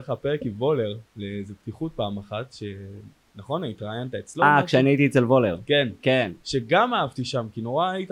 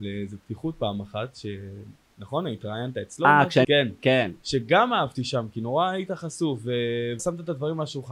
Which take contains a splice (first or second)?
second